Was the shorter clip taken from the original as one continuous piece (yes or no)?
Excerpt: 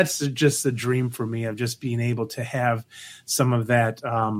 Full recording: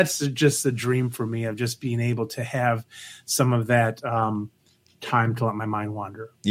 yes